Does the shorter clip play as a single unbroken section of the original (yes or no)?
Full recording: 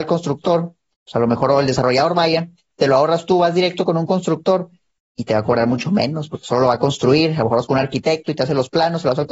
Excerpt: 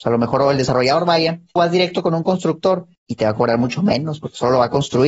no